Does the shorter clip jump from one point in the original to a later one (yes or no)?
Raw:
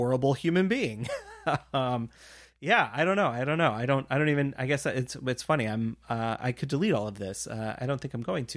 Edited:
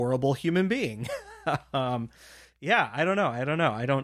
no